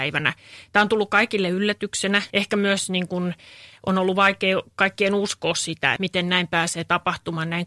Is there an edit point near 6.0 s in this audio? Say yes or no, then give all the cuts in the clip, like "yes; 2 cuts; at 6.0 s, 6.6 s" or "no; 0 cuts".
yes; 2 cuts; at 2.3 s, 6.0 s